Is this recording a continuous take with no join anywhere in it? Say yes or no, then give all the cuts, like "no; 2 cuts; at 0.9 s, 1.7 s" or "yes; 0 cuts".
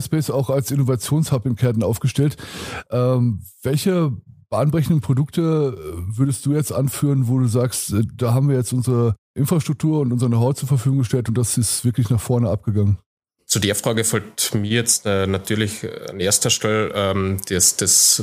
yes; 0 cuts